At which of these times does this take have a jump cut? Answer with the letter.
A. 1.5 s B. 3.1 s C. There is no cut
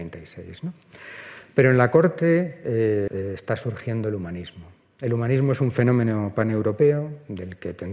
B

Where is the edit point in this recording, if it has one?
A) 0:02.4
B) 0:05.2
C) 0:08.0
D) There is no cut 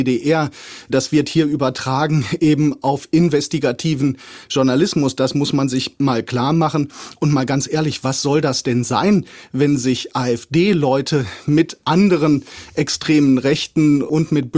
D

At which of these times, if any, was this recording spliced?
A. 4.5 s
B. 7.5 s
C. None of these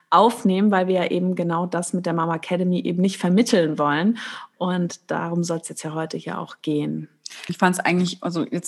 B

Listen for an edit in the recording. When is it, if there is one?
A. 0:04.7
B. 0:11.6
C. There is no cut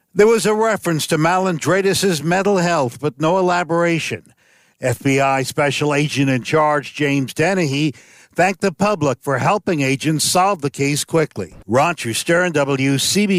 B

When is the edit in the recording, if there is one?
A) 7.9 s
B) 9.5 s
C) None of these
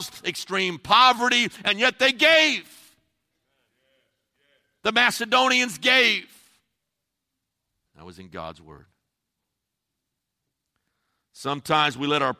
A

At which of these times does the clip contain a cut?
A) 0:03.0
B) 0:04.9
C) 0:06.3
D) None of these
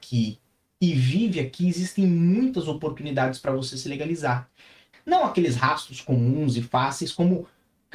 B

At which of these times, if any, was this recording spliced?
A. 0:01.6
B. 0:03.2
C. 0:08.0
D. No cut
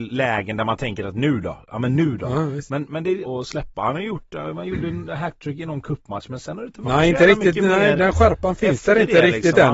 B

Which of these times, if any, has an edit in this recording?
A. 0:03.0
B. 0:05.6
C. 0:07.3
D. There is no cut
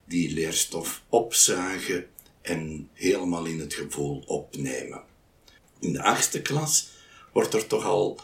B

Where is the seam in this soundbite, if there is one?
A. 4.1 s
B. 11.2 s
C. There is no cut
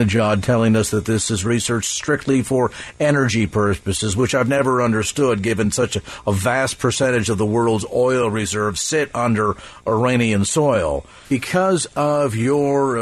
B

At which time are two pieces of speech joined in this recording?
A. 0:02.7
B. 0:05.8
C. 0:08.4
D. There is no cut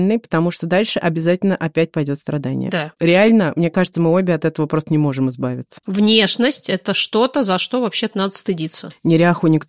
B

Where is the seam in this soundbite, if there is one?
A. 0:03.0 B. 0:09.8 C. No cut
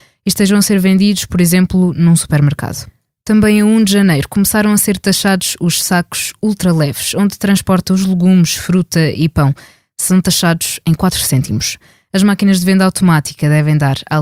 C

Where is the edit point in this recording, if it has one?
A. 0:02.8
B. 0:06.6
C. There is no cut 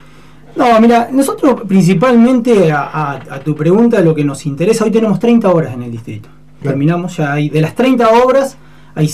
B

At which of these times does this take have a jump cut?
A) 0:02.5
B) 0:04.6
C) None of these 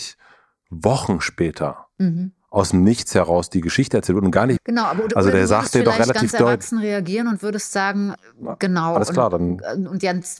B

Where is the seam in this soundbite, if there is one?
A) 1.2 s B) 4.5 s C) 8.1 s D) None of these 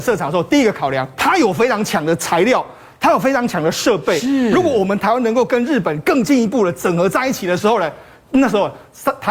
A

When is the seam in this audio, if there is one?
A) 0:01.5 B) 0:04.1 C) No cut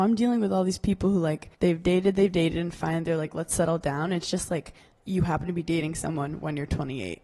A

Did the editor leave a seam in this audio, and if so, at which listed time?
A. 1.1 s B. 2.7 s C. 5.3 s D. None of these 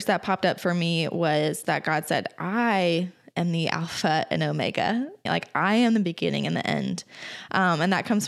C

